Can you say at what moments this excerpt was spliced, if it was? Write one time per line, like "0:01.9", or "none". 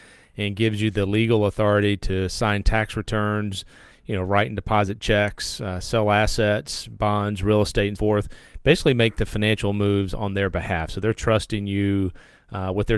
0:08.0